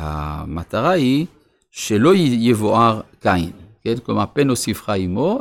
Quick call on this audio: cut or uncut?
uncut